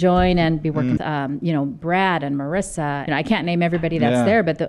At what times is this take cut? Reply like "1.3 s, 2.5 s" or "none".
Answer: 1.0 s, 3.1 s